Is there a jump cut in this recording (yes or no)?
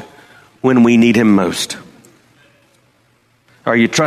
no